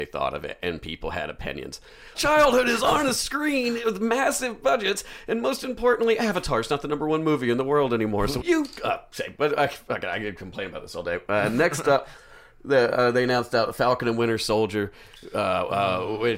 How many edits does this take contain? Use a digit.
2